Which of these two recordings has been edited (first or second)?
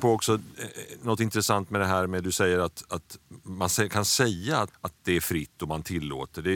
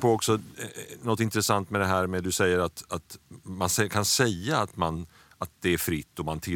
first